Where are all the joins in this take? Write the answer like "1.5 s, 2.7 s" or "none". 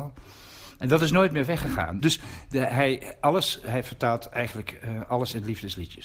2.0 s